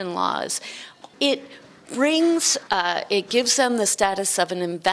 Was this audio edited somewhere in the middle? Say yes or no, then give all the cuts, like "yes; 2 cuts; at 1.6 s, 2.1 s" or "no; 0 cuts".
yes; 2 cuts; at 1.1 s, 2.7 s